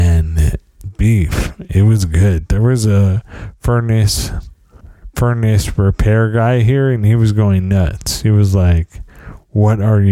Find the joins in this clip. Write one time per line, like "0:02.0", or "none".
none